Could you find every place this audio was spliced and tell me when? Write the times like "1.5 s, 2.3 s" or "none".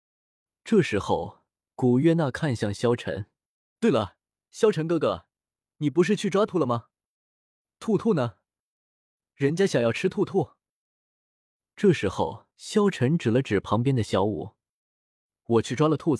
6.5 s, 12.5 s